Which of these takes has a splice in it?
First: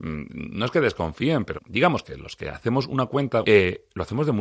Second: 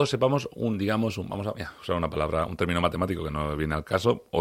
first; 2 cuts; at 1.5 s, 3.4 s

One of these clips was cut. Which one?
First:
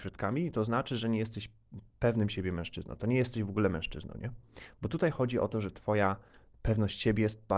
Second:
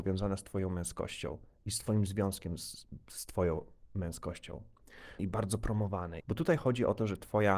second; 2 cuts; at 5.2 s, 6.2 s

